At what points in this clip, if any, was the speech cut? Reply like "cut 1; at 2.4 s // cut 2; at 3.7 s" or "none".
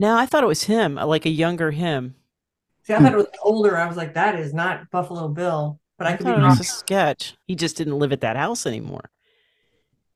cut 1; at 7.4 s